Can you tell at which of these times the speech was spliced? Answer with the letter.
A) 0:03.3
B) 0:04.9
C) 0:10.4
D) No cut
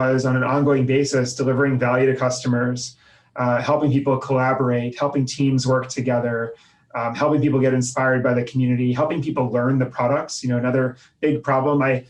D